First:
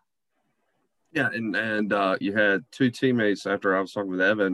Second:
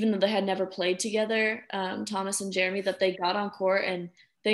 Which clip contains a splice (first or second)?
first